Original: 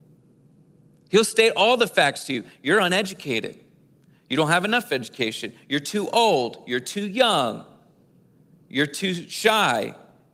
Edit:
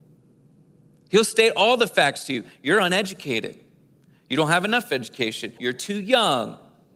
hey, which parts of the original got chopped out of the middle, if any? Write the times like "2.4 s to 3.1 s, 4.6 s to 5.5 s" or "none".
5.6 s to 6.6 s